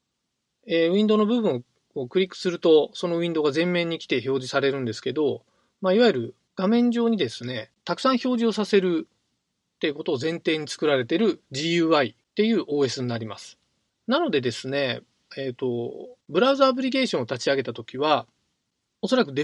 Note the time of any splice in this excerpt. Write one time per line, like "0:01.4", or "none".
0:13.9
0:16.2